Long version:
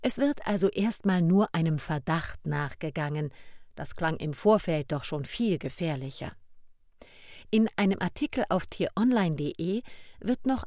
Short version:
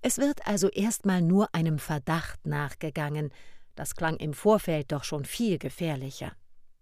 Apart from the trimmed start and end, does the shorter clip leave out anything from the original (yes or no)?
no